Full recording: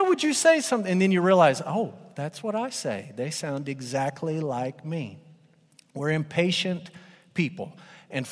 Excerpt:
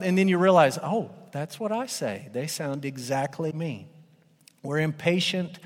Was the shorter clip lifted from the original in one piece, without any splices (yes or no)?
no